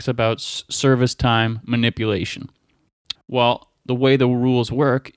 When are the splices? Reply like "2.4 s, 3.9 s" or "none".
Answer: 3.1 s